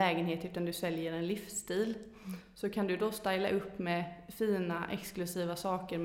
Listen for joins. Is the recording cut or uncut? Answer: uncut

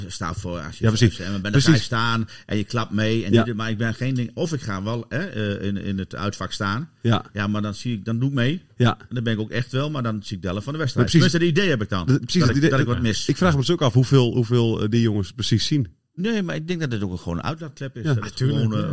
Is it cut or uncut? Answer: uncut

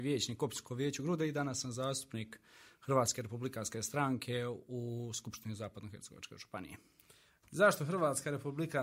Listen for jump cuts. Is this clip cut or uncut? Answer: uncut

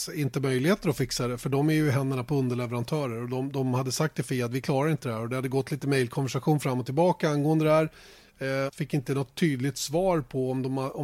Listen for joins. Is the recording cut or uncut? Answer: cut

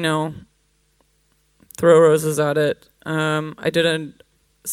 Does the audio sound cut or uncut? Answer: uncut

